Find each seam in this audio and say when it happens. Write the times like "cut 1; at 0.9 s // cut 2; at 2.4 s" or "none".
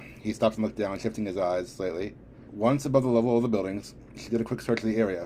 cut 1; at 2.5 s